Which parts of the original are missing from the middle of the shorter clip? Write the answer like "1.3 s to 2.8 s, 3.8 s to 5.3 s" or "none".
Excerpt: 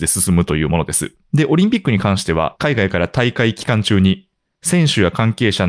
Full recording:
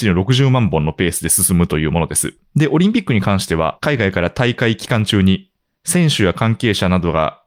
none

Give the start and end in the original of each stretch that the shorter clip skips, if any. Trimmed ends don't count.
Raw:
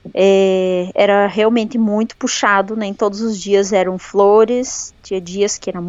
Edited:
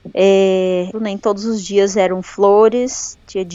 0.9 s to 2.7 s

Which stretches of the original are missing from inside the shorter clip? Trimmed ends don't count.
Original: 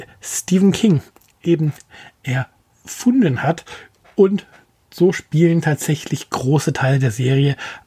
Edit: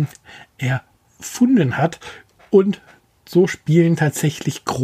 none

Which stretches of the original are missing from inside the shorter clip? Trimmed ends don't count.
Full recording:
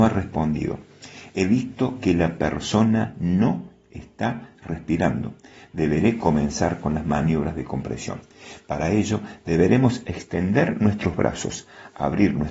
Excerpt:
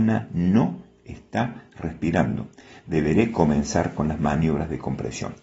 none

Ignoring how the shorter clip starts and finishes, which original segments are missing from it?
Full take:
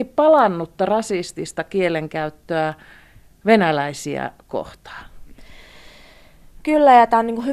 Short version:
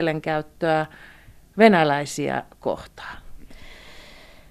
none

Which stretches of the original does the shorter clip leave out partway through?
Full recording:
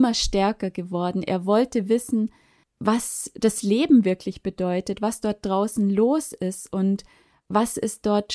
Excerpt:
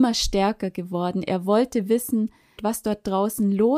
2.6 s to 5.0 s

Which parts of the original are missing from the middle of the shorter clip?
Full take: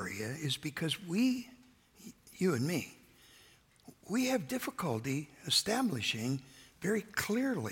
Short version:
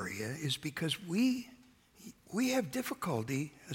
2.2 s to 4.0 s

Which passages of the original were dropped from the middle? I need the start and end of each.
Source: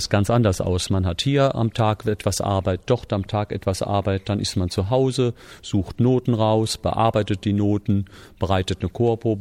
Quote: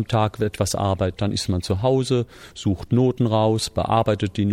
2.8 s to 4.2 s

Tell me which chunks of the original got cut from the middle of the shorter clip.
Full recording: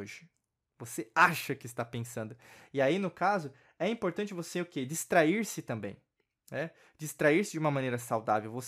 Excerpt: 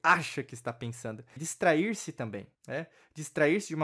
2.5 s to 4.9 s, 6.0 s to 6.4 s

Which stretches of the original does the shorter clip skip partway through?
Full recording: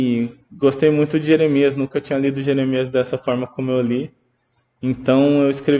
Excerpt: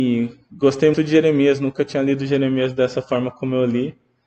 0.9 s to 1.1 s

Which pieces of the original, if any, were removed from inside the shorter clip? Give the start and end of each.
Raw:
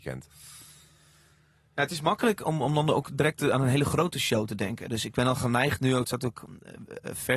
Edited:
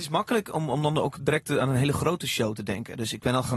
none

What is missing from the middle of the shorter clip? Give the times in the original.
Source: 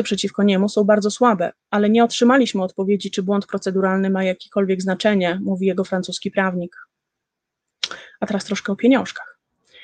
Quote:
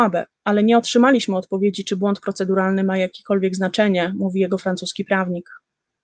none

